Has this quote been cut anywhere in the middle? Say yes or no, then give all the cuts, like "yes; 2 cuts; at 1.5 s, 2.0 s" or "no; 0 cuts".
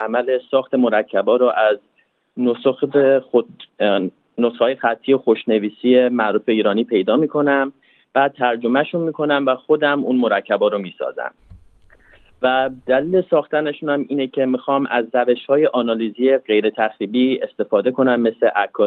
no; 0 cuts